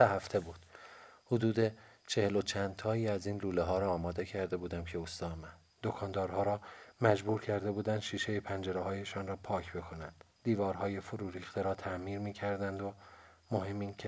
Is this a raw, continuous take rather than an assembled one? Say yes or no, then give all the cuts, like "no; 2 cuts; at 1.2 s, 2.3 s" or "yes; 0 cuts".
no; 2 cuts; at 5.7 s, 10.3 s